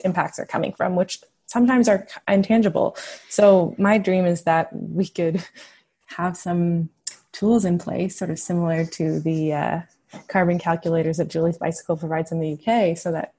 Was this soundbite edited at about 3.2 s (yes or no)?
no